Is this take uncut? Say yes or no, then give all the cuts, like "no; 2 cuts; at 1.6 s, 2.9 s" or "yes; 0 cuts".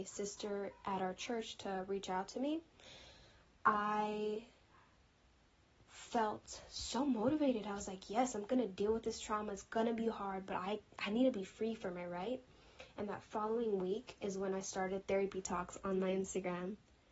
yes; 0 cuts